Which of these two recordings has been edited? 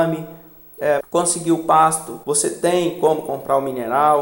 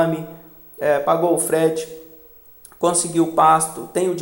first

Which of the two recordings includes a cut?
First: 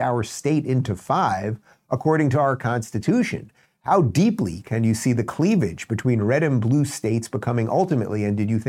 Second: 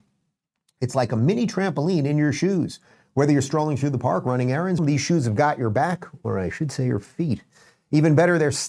second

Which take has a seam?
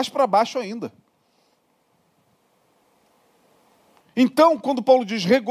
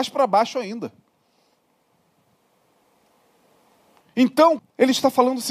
second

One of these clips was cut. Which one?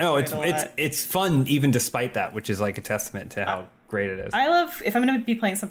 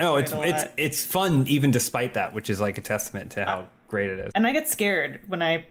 second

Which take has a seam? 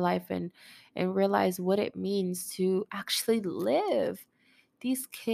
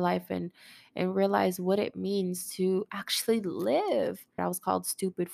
second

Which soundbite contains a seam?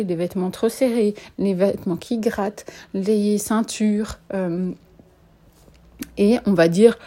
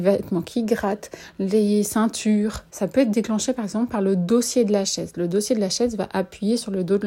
second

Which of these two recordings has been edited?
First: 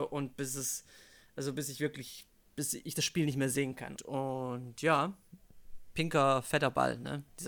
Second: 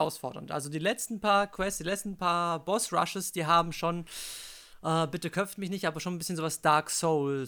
first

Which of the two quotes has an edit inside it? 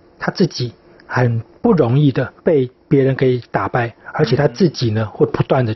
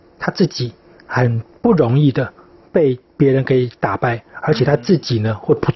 first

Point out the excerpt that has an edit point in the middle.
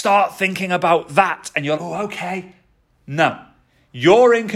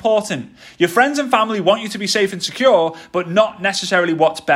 first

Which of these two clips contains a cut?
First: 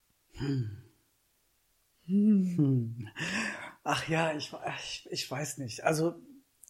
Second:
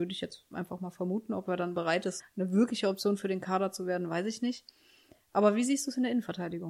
second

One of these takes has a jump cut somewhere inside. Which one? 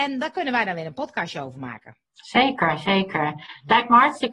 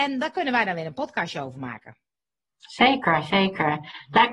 first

